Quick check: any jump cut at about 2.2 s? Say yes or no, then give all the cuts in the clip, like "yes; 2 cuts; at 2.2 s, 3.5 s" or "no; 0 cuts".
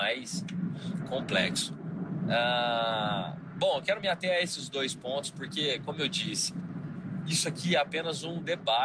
no; 0 cuts